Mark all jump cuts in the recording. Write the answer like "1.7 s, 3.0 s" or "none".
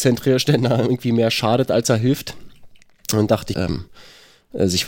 3.5 s